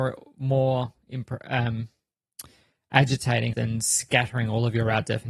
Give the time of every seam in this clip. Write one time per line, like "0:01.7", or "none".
0:03.5